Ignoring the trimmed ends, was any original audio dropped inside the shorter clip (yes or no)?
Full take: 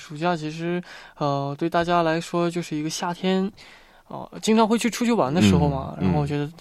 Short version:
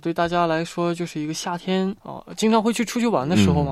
yes